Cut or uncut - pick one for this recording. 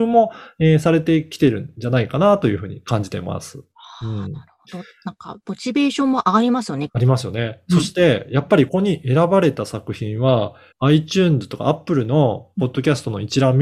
cut